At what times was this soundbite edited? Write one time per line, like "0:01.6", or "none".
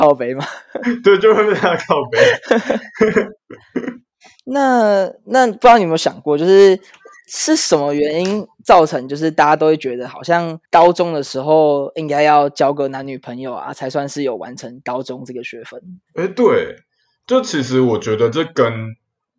0:10.6
0:16.0